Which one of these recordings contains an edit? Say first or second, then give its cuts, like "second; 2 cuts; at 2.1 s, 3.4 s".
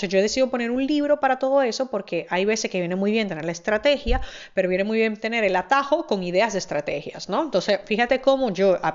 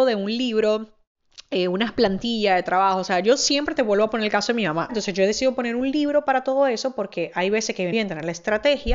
second; 2 cuts; at 4.9 s, 7.9 s